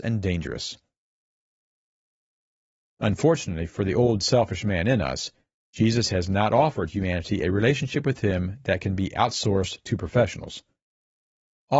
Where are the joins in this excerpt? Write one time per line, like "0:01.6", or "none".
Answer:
none